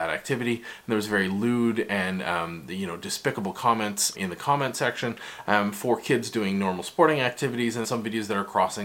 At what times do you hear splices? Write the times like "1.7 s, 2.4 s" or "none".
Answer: 4.1 s, 7.8 s

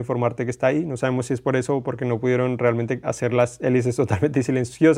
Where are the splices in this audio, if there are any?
3.0 s

